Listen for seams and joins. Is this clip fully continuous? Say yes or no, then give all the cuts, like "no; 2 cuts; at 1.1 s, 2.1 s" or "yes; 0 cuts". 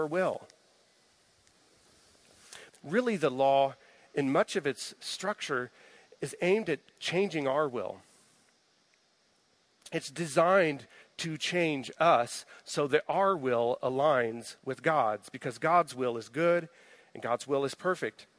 no; 1 cut; at 2.7 s